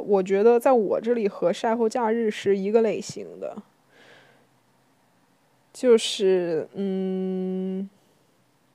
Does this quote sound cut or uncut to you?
uncut